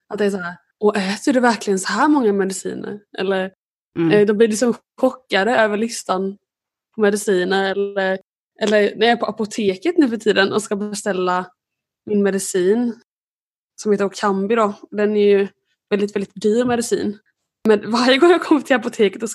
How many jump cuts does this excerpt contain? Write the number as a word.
zero